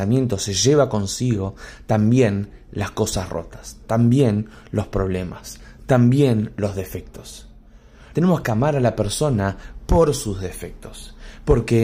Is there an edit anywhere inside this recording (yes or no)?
yes